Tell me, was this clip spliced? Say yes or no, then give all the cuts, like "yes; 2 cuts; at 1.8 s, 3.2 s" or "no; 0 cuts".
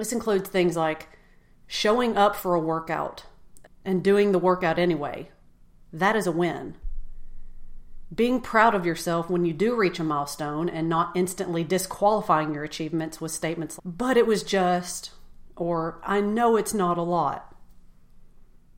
yes; 2 cuts; at 3.6 s, 13.8 s